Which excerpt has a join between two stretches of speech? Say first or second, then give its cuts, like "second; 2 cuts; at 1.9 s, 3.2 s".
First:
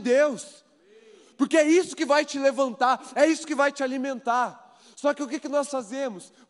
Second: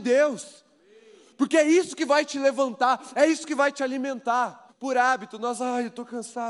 second; 1 cut; at 4.7 s